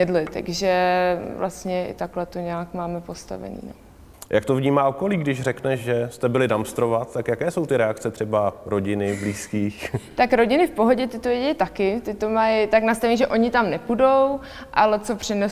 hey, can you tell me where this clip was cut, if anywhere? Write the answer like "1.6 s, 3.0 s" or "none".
none